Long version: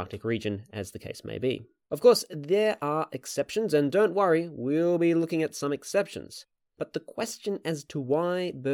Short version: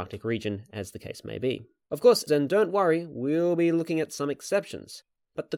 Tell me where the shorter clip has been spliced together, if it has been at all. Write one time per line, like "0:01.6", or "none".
0:02.3